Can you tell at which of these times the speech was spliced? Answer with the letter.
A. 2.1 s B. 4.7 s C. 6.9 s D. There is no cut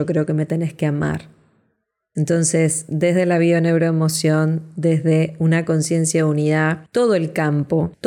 D